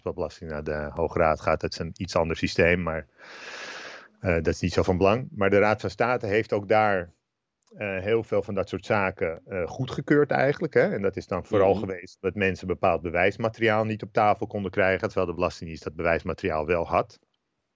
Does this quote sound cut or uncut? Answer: uncut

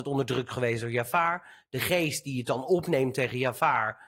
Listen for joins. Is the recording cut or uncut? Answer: uncut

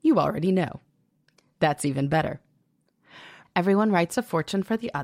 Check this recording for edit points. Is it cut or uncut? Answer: cut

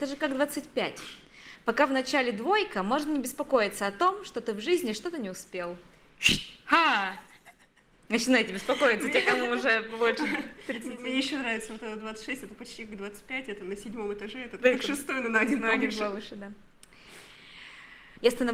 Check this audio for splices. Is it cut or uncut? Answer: uncut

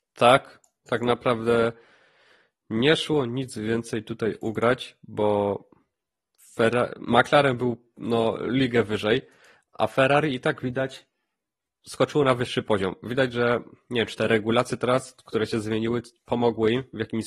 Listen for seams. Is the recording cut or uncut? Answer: uncut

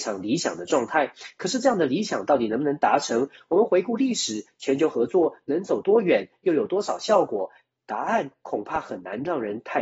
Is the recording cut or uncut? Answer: uncut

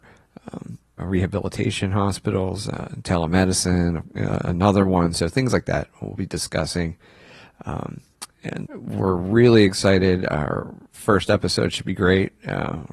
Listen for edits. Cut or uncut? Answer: cut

